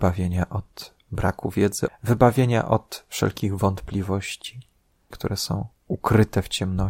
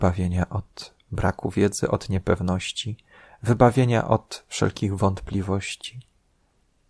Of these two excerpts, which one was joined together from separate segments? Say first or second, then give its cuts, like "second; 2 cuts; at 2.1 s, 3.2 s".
first; 2 cuts; at 1.9 s, 5.1 s